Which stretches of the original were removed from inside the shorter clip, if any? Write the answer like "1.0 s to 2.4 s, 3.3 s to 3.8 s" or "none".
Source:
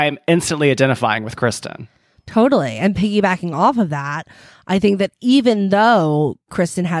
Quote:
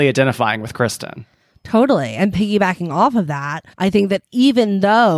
4.3 s to 4.6 s

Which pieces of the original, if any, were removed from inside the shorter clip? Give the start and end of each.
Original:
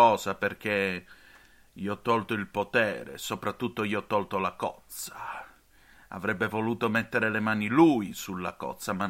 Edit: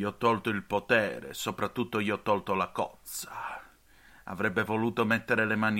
none

